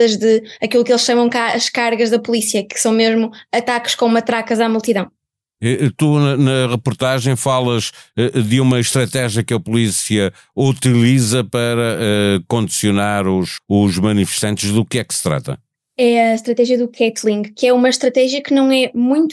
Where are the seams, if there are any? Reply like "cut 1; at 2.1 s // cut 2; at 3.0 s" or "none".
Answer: cut 1; at 13.6 s